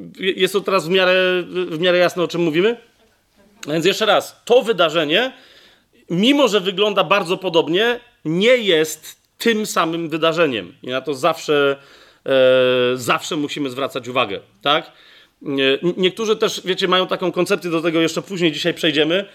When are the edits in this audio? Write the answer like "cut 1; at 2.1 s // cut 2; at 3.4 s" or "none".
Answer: none